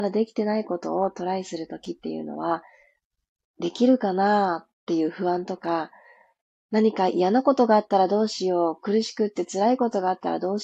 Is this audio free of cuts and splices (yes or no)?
yes